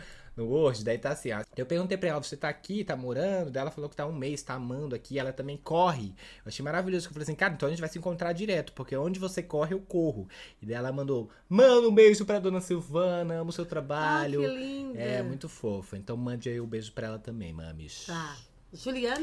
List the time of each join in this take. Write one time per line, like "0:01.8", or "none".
0:01.4